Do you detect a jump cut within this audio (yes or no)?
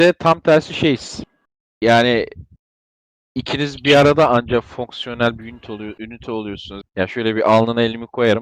yes